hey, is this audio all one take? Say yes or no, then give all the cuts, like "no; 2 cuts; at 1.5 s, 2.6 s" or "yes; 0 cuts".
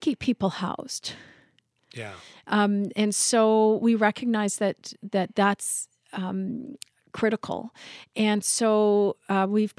yes; 0 cuts